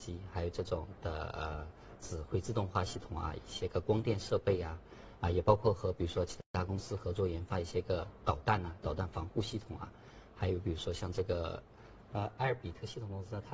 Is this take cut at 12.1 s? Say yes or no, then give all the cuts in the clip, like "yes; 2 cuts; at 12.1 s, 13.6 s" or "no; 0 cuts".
yes; 1 cut; at 12.1 s